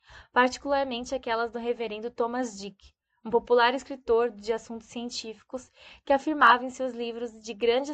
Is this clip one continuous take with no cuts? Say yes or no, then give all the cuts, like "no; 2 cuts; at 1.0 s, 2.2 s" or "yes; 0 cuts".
yes; 0 cuts